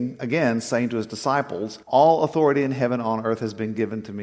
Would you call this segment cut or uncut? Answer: cut